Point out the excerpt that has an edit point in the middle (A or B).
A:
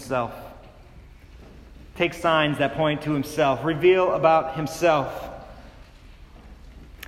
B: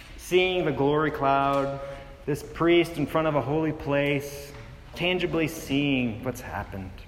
B